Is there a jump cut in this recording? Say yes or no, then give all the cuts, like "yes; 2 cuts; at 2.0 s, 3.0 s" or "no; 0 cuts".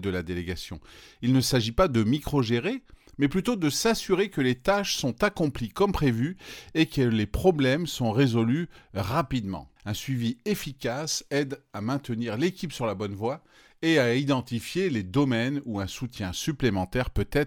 yes; 1 cut; at 9.8 s